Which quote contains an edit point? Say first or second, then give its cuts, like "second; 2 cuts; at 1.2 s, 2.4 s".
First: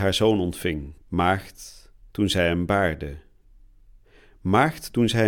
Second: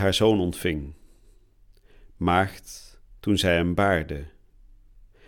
first; 1 cut; at 1.0 s